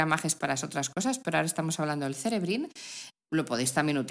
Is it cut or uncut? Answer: uncut